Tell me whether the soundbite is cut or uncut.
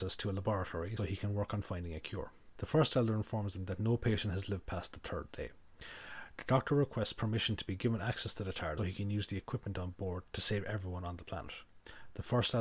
cut